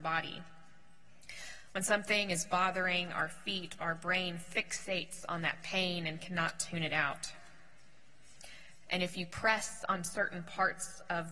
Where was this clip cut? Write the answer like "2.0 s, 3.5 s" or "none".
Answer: 1.7 s, 8.9 s